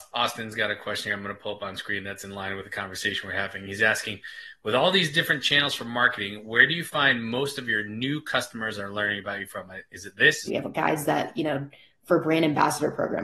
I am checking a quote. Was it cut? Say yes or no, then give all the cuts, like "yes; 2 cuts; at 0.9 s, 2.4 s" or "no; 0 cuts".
yes; 1 cut; at 10.5 s